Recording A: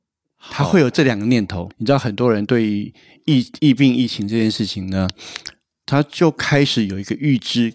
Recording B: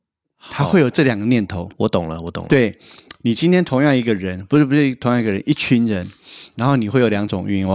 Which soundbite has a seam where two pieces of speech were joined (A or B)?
A